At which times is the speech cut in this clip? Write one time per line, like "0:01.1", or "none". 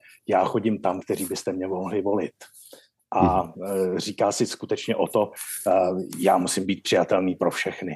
0:01.0